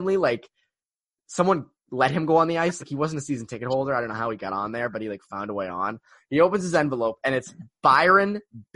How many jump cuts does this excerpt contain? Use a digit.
0